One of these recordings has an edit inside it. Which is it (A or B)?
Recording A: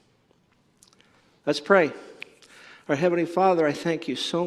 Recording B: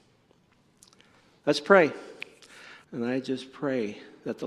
B